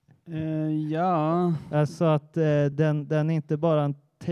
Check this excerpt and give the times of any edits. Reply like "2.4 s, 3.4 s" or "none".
none